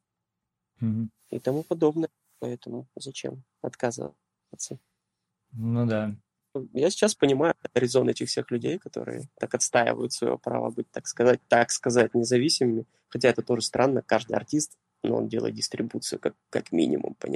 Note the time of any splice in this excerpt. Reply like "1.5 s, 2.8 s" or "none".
none